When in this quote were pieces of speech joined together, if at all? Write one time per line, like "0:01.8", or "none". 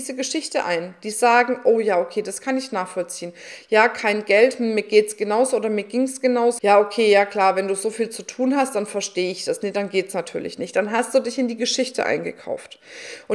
0:06.6